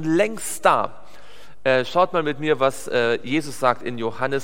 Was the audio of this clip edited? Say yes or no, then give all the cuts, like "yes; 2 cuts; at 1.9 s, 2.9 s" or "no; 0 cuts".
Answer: no; 0 cuts